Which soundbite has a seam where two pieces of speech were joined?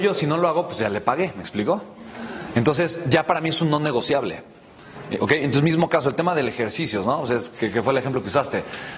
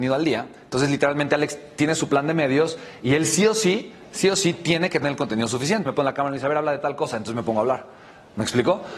second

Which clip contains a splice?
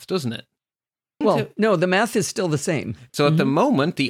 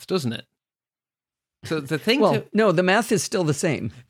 first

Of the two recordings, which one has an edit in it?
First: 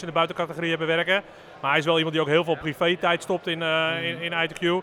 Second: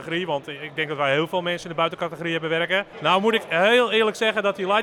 second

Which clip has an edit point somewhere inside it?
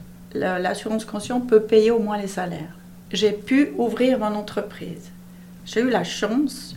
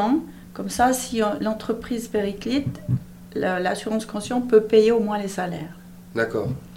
first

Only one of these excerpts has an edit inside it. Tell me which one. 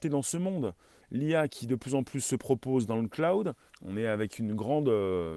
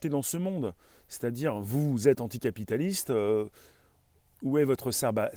first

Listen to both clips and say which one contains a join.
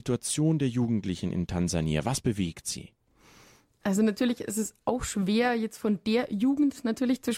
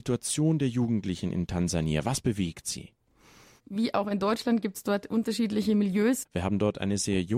second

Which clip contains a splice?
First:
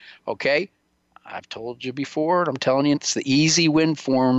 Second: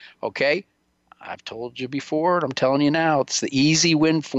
first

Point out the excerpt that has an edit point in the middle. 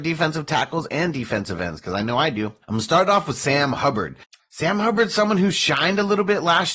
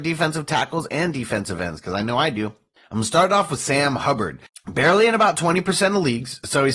first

